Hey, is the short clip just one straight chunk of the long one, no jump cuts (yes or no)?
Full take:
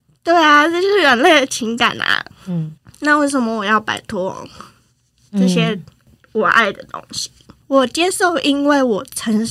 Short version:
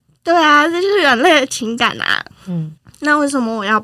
yes